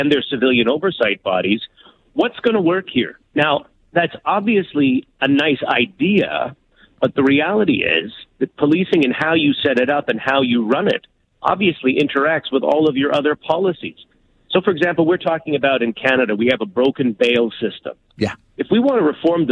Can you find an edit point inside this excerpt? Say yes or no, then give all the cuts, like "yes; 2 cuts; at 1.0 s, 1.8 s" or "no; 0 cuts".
yes; 1 cut; at 3.2 s